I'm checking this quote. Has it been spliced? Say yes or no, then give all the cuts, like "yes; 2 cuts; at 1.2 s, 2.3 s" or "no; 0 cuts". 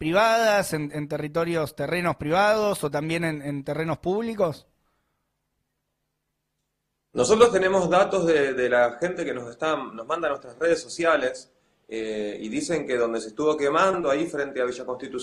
no; 0 cuts